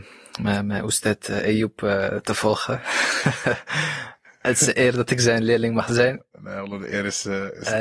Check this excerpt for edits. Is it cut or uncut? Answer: uncut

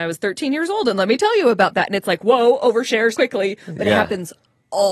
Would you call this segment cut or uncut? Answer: cut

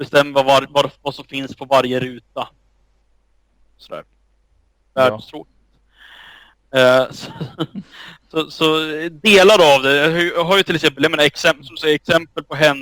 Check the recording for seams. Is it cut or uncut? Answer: uncut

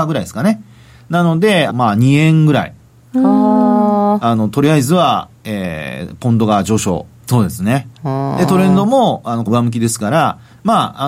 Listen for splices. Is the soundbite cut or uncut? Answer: cut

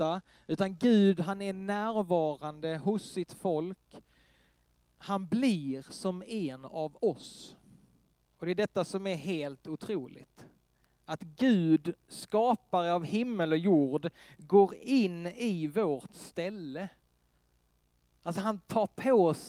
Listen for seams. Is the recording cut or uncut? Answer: cut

